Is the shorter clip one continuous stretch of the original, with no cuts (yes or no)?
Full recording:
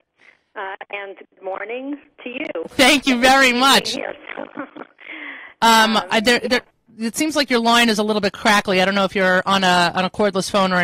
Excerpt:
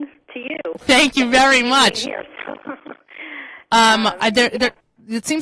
yes